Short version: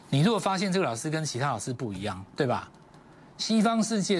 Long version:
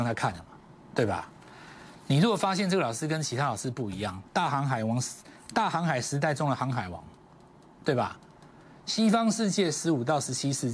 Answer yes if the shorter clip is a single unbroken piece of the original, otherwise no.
no